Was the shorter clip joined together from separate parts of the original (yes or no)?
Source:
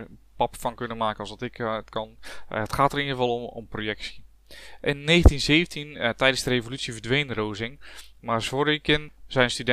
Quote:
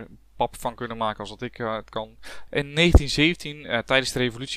yes